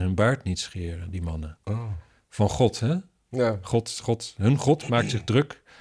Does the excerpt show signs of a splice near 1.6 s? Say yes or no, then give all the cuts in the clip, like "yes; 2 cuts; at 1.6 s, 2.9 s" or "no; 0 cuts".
no; 0 cuts